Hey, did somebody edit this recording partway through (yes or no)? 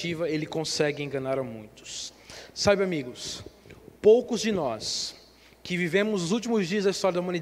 no